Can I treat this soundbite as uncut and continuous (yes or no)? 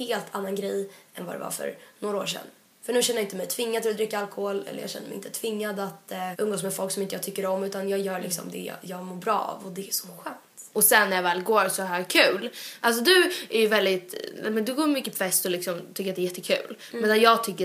no